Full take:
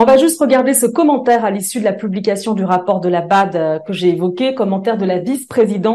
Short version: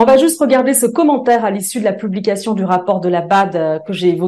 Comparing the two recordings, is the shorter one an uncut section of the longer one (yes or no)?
yes